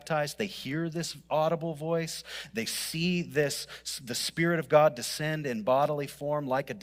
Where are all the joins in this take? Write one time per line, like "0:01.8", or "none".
none